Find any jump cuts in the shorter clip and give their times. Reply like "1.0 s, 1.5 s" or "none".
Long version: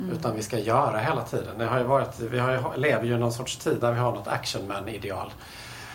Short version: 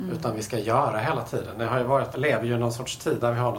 2.1 s